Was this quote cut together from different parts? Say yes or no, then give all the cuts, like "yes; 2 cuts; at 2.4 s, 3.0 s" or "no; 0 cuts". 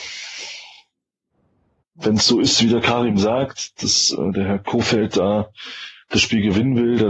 yes; 1 cut; at 1.8 s